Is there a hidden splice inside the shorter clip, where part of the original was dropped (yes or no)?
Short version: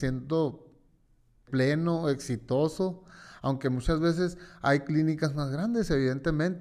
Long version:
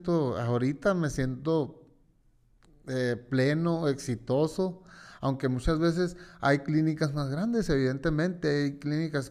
yes